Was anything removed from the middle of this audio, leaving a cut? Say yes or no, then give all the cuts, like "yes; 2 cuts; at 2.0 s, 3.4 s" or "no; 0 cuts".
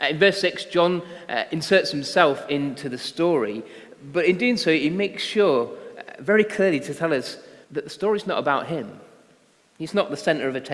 yes; 1 cut; at 7.6 s